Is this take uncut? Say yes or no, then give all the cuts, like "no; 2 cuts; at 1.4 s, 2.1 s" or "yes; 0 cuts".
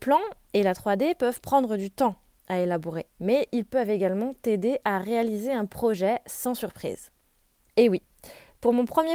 no; 1 cut; at 7.7 s